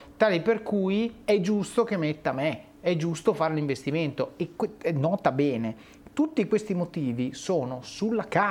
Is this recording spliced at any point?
no; 0 cuts

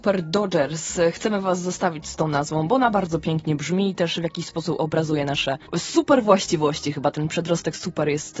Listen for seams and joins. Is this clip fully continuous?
yes; 0 cuts

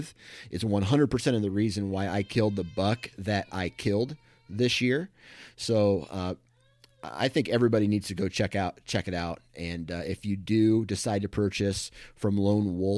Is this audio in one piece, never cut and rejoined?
yes; 0 cuts

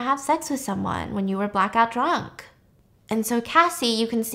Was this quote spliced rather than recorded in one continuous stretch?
no; 0 cuts

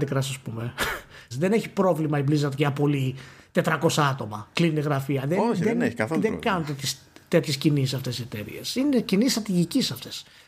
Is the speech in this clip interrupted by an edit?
yes; 1 cut; at 1.3 s

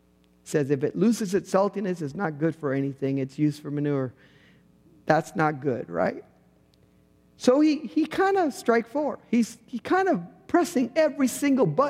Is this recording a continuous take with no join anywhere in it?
yes; 0 cuts

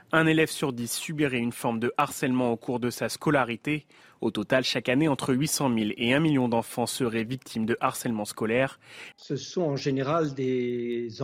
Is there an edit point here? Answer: yes; 1 cut; at 9.1 s

